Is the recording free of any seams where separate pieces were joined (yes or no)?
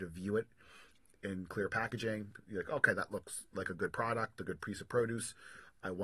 yes